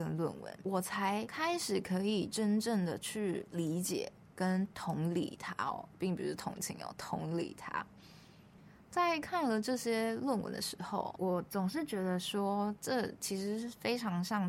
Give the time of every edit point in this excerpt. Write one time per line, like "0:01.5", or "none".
none